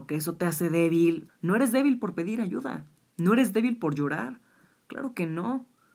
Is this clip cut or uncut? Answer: cut